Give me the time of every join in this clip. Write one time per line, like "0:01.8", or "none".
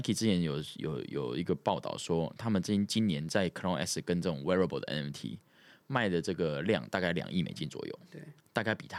none